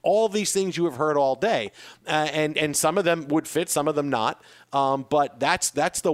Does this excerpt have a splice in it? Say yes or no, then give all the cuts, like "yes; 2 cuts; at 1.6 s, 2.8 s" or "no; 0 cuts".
no; 0 cuts